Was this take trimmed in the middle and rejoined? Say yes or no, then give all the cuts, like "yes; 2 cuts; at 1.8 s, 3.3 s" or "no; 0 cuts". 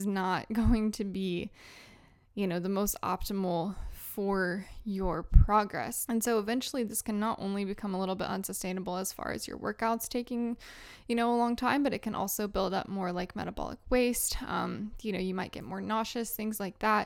yes; 1 cut; at 6.1 s